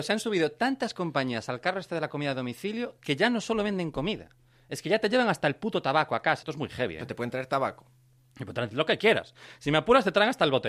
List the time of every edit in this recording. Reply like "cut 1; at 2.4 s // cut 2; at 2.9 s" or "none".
cut 1; at 6.4 s